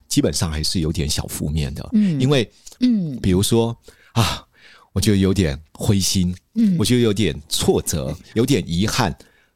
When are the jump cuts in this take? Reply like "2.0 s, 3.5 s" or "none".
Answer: 2.8 s, 8.3 s